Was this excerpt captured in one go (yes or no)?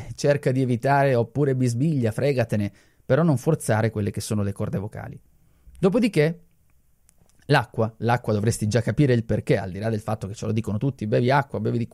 yes